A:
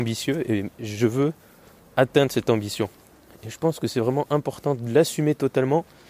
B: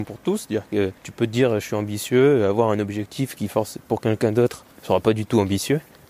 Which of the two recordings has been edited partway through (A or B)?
B